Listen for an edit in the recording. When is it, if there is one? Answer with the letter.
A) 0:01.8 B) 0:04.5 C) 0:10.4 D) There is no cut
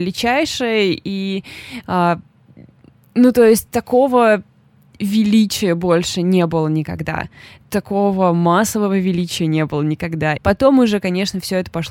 C